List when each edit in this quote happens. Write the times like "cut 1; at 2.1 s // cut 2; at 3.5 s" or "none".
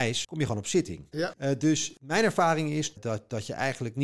cut 1; at 1.1 s // cut 2; at 2.9 s